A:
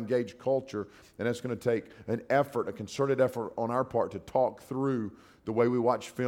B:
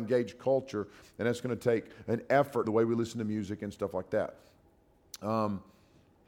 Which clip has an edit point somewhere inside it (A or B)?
B